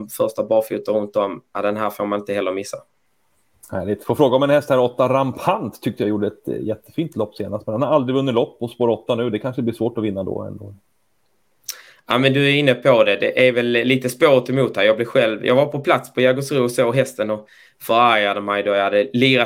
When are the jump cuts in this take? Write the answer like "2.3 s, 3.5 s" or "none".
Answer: none